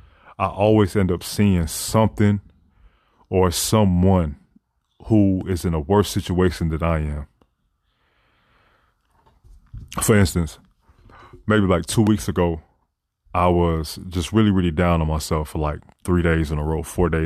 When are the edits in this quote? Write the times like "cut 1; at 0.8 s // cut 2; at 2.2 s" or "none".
none